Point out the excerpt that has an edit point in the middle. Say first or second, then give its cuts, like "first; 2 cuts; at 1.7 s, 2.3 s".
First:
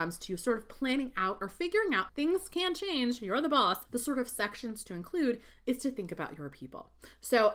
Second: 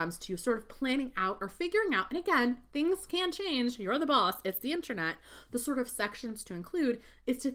first; 2 cuts; at 2.1 s, 3.8 s